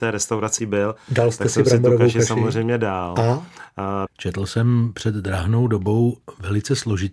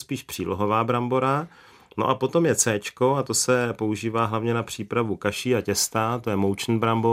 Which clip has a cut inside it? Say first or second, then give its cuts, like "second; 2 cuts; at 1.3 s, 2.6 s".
first; 1 cut; at 4.1 s